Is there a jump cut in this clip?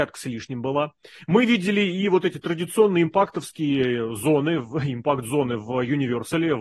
no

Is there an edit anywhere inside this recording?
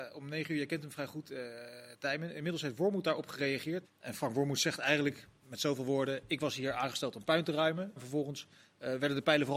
yes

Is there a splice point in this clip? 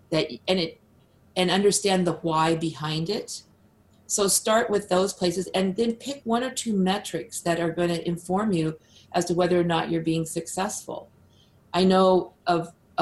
no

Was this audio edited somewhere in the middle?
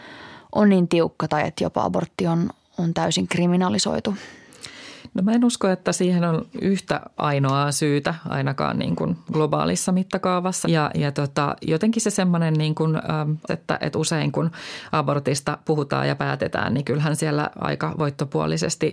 yes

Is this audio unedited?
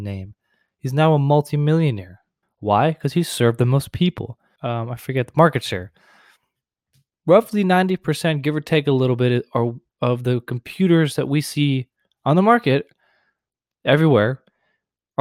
no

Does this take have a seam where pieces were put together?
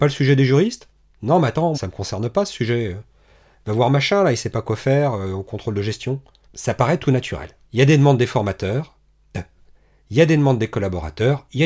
yes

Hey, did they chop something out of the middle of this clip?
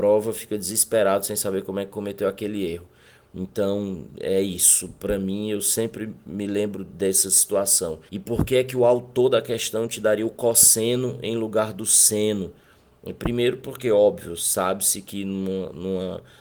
yes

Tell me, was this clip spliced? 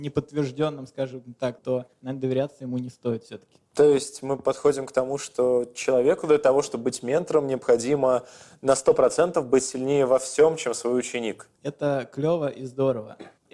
yes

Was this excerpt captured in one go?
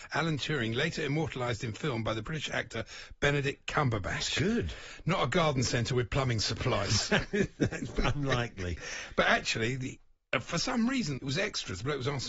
no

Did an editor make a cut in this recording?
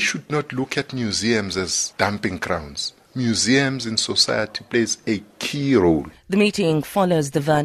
yes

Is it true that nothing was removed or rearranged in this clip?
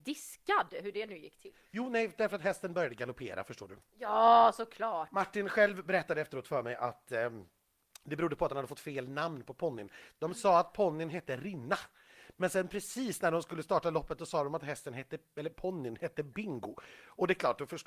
yes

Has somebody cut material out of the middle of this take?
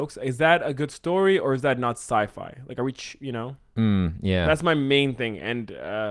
no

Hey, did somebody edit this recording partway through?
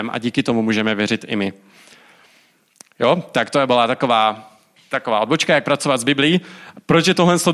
no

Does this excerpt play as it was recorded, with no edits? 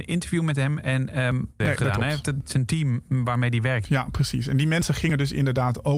no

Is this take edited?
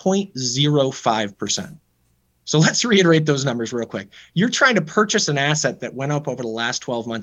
no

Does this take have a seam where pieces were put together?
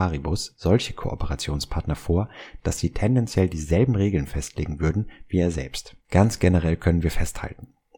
yes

